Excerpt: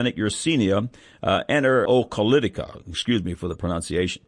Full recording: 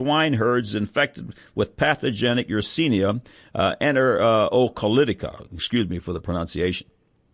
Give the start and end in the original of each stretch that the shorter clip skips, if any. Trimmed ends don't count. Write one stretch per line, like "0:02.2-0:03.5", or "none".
0:04.2-0:04.5